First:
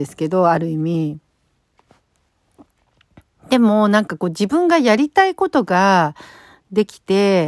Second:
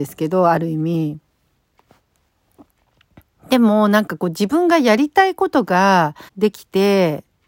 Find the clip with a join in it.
second; 1 cut; at 6.3 s

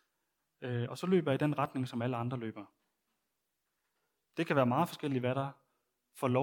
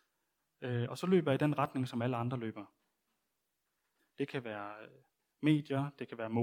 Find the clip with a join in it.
second; 1 cut; at 4.0 s

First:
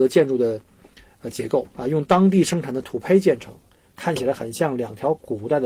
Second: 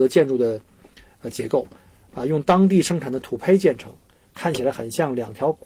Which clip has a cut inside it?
first; 1 cut; at 1.7 s

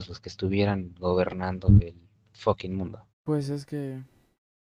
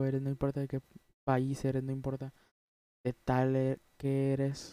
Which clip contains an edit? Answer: first; 1 cut; at 3.1 s

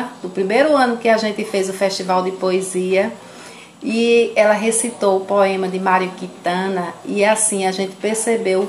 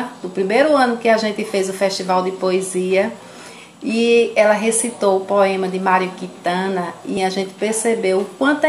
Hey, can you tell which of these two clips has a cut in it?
second; 1 cut; at 7.2 s

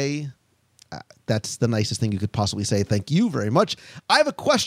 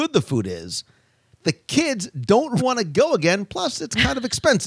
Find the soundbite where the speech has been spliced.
second; 1 cut; at 2.6 s

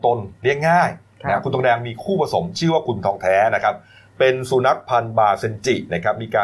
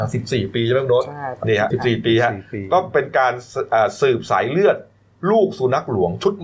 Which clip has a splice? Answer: second; 1 cut; at 1.7 s

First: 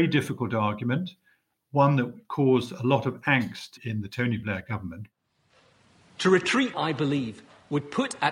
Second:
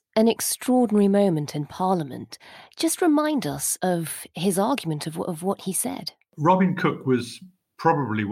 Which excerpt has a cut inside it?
first; 1 cut; at 6.7 s

